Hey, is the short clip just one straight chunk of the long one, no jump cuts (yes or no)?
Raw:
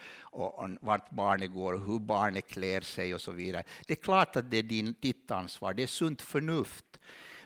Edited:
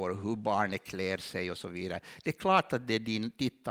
yes